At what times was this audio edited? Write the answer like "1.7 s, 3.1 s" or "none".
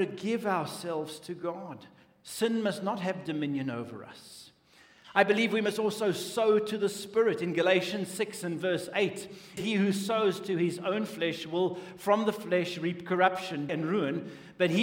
9.6 s, 13.7 s